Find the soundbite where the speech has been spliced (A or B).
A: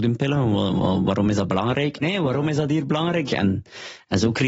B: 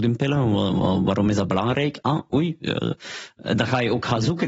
A